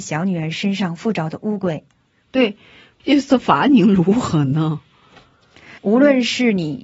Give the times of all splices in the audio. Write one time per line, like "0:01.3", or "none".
0:03.0
0:05.8